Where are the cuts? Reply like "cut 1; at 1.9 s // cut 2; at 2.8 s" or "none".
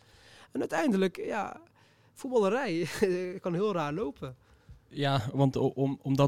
none